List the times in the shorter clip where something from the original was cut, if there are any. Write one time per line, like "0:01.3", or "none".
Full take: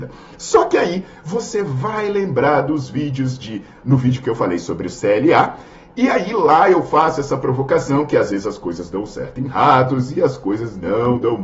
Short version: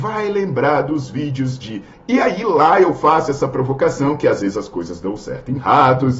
0:01.9